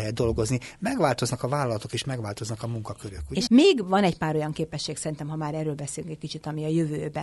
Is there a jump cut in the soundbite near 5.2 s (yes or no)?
no